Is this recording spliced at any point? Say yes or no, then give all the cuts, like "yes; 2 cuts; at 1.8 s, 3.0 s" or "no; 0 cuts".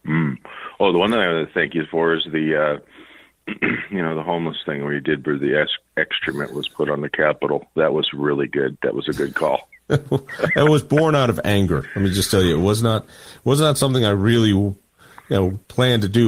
no; 0 cuts